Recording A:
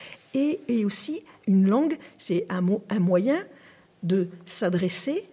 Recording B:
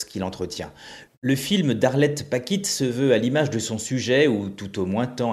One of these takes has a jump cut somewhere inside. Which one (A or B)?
B